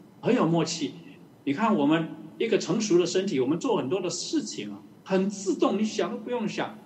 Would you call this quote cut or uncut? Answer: cut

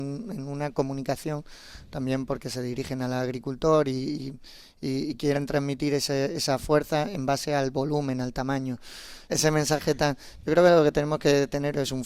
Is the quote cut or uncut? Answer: cut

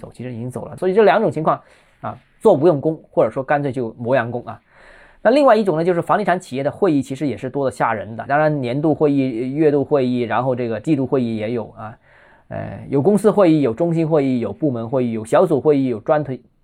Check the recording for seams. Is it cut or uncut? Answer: cut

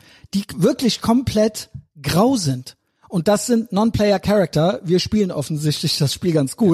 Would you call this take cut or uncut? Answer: uncut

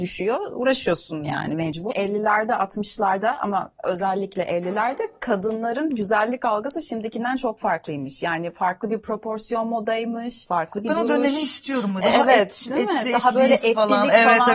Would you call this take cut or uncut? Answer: uncut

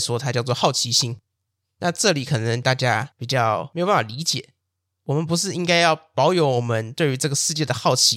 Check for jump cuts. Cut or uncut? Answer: uncut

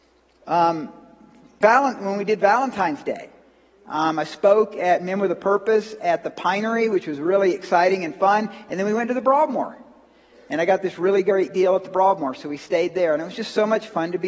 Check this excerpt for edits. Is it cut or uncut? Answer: cut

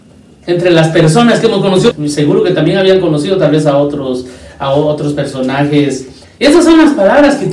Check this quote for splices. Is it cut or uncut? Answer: cut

